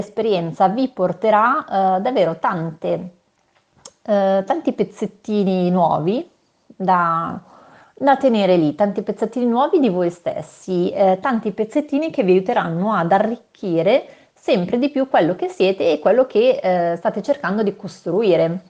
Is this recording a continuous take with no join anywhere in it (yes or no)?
yes